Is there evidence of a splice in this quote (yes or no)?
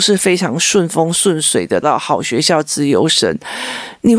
yes